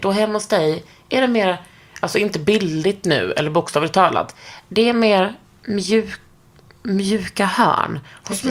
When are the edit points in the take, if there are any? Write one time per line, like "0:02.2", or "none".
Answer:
none